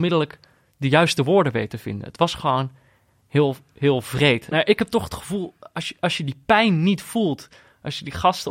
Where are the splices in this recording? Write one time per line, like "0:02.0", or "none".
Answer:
0:04.5

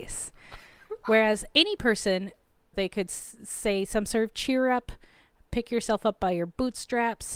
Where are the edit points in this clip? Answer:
0:02.7

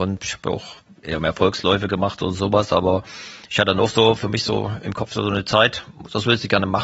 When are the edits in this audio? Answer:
none

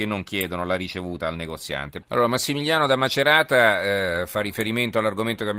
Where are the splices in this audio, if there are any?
0:02.0

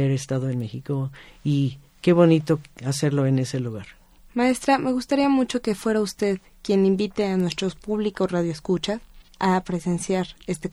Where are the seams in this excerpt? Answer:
none

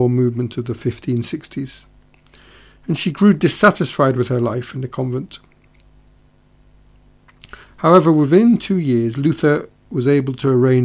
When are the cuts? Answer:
0:07.6

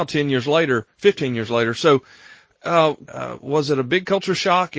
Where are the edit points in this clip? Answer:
0:03.1

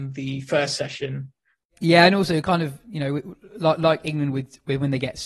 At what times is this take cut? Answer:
0:01.7

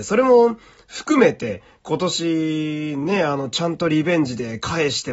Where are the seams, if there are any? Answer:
none

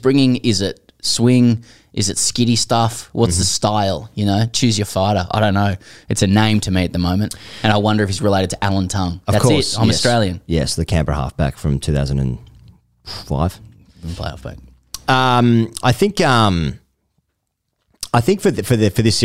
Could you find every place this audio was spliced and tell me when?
0:15.8

